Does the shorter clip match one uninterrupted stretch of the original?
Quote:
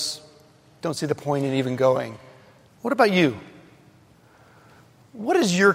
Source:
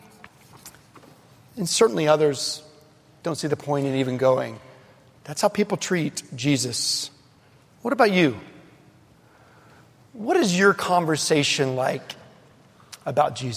no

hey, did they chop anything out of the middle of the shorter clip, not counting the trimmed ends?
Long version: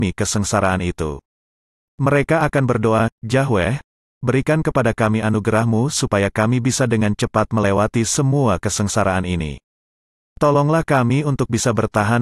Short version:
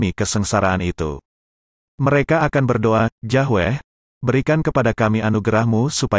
no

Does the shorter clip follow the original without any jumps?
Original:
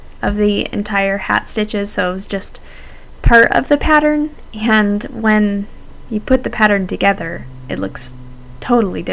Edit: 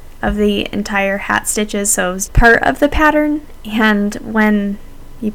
no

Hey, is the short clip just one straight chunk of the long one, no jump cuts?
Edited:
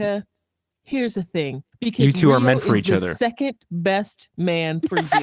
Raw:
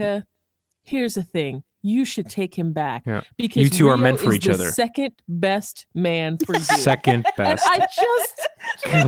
no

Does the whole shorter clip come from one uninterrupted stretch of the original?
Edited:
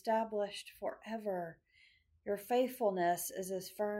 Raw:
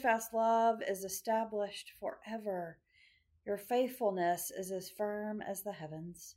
yes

